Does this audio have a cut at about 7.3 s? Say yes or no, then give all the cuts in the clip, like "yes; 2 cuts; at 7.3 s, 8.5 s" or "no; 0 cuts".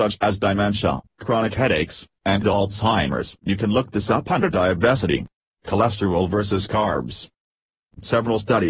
no; 3 cuts; at 1.1 s, 3.4 s, 5.4 s